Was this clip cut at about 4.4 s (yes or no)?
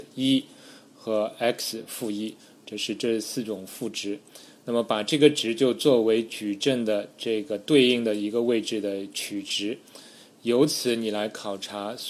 no